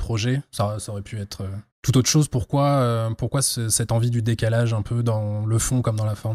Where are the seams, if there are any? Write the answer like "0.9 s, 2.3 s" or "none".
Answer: 1.7 s